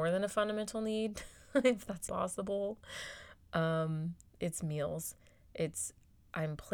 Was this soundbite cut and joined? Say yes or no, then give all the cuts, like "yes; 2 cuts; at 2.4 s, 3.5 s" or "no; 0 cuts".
yes; 1 cut; at 2.1 s